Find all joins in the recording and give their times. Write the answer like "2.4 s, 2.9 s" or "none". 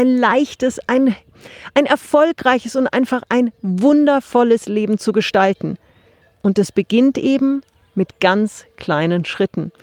none